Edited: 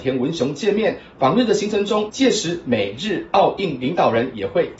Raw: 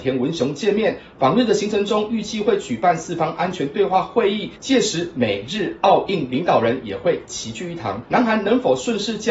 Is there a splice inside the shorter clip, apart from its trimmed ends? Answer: yes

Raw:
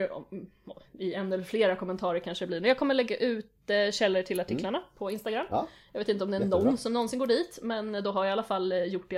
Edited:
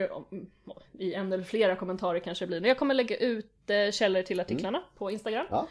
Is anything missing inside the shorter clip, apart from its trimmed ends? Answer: no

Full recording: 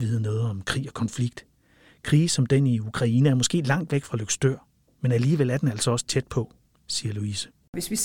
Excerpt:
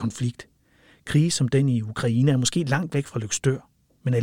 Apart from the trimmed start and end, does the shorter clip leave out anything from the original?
no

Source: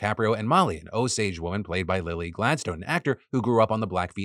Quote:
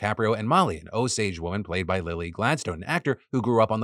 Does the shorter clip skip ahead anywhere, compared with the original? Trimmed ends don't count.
no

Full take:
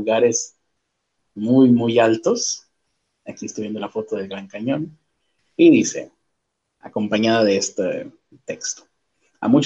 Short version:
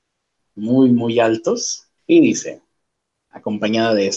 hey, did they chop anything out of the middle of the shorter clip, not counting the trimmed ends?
yes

